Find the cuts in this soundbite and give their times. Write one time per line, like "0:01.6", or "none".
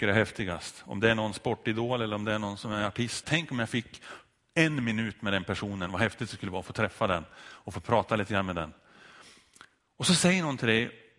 0:03.2